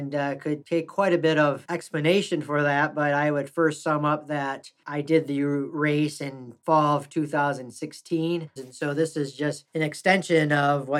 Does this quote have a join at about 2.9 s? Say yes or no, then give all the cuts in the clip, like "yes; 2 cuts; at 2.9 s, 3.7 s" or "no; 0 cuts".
no; 1 cut; at 8.6 s